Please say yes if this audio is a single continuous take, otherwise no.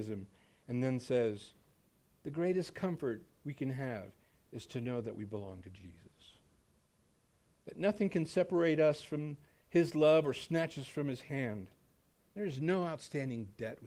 no